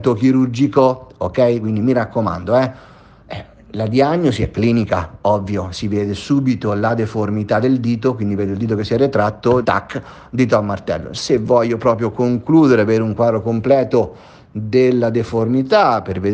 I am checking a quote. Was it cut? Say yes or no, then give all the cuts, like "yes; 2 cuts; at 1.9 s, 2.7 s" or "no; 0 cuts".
yes; 1 cut; at 9.6 s